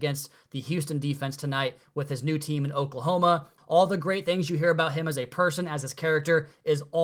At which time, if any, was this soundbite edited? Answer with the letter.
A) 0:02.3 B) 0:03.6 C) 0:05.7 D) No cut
B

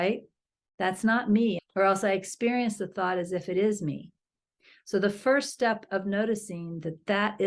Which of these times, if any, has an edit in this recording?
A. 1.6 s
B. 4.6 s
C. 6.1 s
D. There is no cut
A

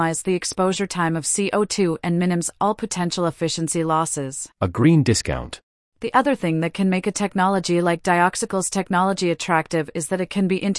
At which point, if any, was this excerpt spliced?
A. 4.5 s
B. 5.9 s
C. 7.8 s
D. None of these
A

